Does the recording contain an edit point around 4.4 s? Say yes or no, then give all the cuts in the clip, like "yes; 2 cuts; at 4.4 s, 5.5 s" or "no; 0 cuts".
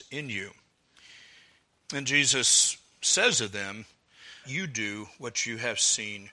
yes; 1 cut; at 4.4 s